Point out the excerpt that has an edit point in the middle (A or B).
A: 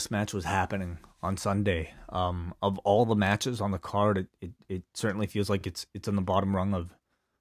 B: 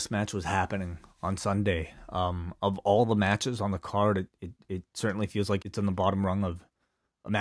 B